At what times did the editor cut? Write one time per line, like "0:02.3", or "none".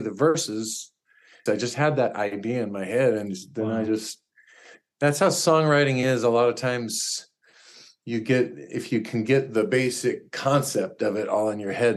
0:01.5